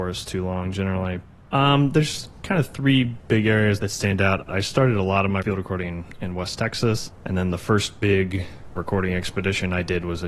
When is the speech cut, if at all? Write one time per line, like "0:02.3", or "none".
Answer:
0:01.5